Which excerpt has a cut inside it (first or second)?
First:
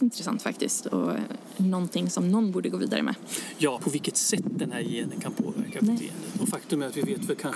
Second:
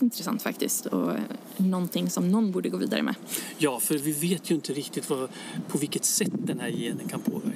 first